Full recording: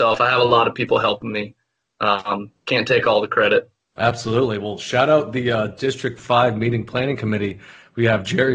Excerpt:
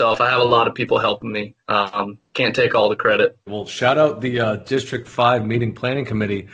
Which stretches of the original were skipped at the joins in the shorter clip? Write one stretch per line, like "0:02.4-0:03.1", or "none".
0:01.6-0:01.9
0:03.8-0:04.6